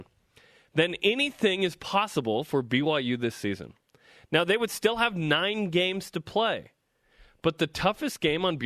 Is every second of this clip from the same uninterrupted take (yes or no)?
yes